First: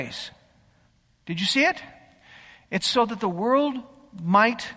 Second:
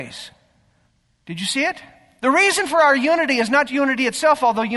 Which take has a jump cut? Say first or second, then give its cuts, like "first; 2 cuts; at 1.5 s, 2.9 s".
second; 2 cuts; at 2.2 s, 3.7 s